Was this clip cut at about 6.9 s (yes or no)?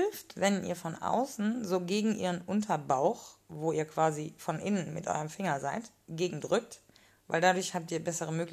no